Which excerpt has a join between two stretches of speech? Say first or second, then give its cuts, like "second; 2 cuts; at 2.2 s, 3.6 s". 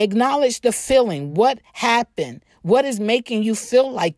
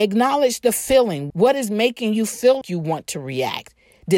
second; 2 cuts; at 1.3 s, 2.6 s